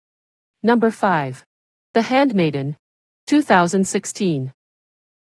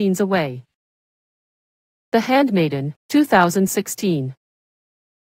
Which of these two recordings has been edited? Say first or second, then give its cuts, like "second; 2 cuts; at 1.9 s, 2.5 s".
second; 2 cuts; at 1.9 s, 3.0 s